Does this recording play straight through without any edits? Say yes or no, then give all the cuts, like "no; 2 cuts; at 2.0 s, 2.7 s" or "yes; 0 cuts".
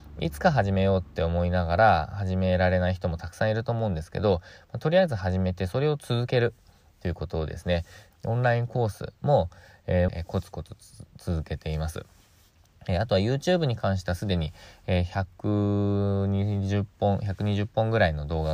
no; 2 cuts; at 8.1 s, 10.1 s